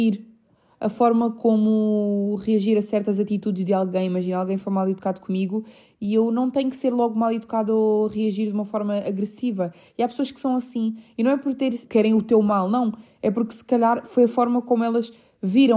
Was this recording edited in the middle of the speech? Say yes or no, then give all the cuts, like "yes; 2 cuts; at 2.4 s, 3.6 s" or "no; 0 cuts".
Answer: yes; 1 cut; at 11.9 s